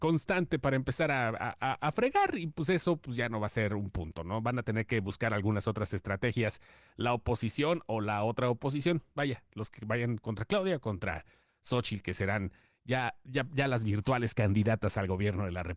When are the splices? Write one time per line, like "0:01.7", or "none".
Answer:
none